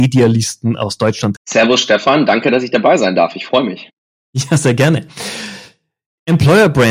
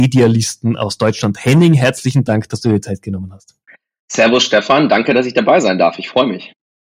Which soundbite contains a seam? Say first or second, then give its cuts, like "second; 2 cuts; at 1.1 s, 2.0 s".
first; 1 cut; at 1.4 s